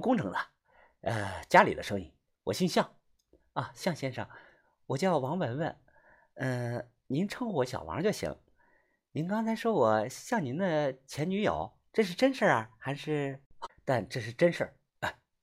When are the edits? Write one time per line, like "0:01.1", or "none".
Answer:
0:13.7